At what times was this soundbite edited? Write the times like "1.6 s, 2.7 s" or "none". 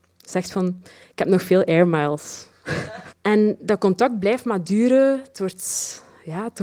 3.1 s